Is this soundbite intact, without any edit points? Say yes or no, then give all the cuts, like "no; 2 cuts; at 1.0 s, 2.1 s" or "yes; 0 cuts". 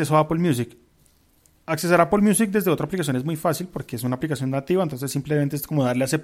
yes; 0 cuts